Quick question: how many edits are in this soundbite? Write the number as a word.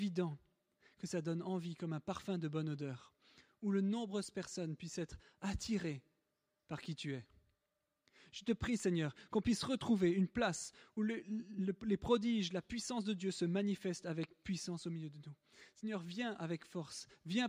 zero